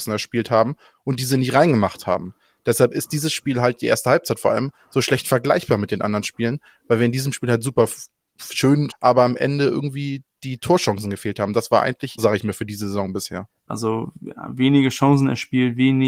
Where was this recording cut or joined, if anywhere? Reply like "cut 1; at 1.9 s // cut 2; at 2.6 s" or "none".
cut 1; at 8.9 s // cut 2; at 12.2 s // cut 3; at 13.7 s